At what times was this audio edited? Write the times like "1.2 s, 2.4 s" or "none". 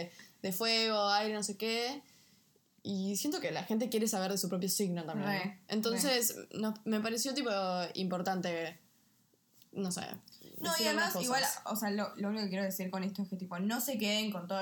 none